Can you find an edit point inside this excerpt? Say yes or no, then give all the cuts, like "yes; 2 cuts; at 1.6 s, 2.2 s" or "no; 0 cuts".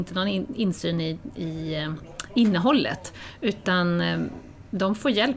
no; 0 cuts